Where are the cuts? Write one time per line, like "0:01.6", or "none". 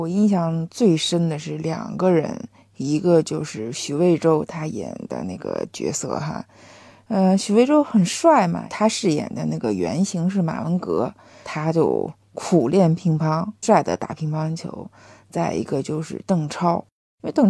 0:13.6